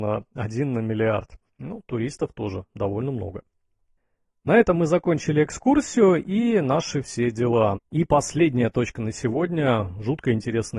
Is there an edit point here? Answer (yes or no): yes